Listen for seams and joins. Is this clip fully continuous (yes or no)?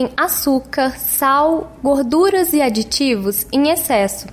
yes